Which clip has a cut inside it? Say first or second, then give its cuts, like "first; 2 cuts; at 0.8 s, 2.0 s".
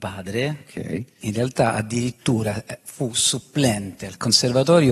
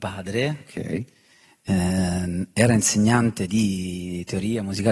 first; 1 cut; at 1.2 s